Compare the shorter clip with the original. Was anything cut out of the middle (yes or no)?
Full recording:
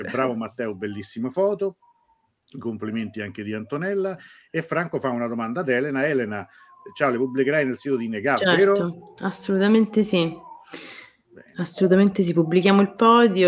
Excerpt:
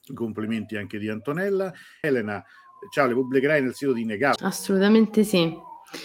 yes